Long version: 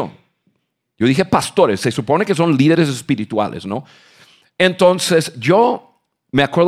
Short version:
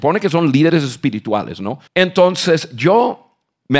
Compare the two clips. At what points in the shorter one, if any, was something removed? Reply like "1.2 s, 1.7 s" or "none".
1.9 s